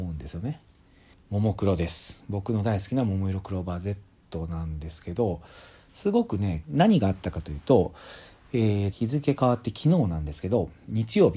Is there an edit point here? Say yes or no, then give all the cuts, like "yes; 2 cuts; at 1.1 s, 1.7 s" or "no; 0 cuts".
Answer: yes; 3 cuts; at 1.1 s, 6.6 s, 8.9 s